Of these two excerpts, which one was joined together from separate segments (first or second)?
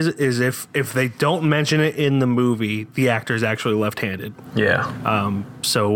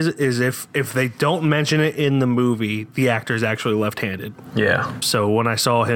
second